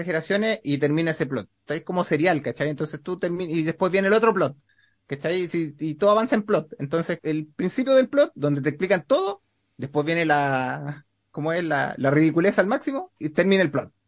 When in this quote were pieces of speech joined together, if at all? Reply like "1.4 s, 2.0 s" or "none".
7.2 s